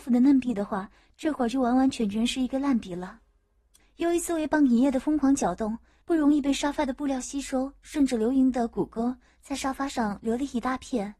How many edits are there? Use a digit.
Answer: 2